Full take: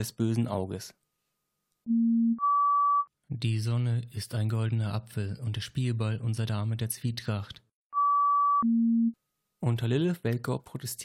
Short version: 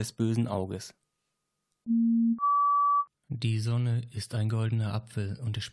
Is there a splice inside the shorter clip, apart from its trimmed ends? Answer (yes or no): no